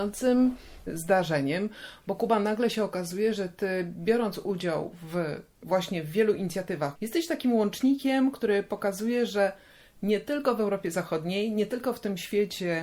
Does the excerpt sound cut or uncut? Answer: cut